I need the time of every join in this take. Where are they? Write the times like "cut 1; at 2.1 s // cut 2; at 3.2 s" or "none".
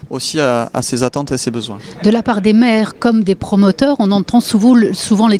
none